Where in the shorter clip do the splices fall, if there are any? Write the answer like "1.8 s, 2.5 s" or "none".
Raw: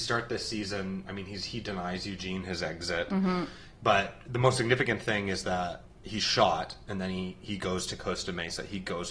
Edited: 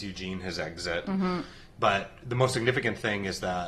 none